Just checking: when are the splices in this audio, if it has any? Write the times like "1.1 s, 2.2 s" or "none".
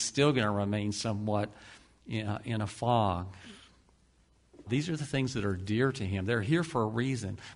4.7 s

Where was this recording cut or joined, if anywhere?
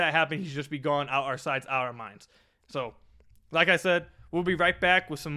2.6 s

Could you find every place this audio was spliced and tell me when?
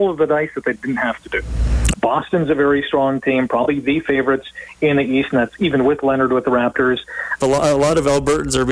1.9 s, 7.4 s

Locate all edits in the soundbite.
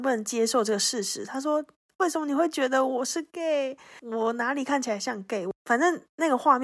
none

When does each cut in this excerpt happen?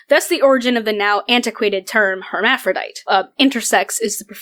3.1 s

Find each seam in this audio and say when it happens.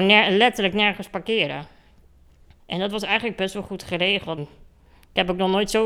2.6 s, 4.4 s

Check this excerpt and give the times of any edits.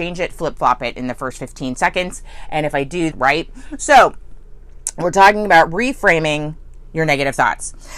3.1 s

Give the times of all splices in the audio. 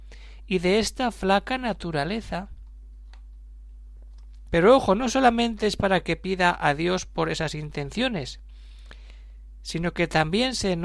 4.5 s

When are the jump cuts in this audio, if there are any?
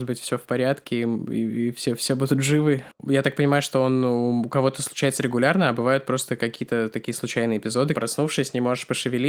2.9 s, 7.9 s

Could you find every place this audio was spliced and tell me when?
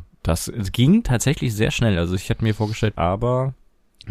2.9 s

